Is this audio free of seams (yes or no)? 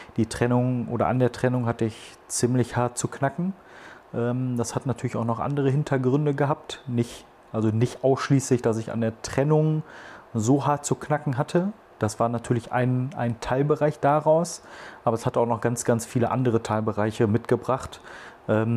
yes